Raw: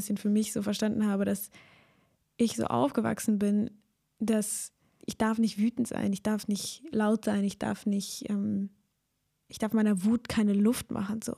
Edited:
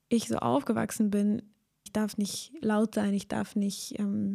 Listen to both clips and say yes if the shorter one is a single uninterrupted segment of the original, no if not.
no